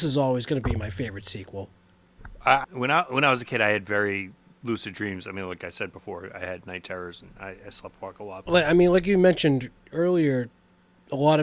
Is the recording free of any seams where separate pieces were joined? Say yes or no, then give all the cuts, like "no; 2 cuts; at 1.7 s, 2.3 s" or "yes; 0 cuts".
no; 2 cuts; at 2.6 s, 8.5 s